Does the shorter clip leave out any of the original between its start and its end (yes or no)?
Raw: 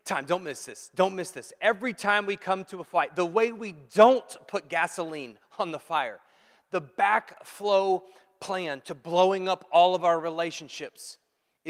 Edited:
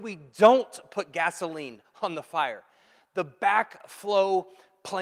no